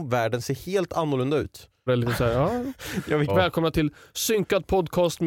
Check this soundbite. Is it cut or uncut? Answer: cut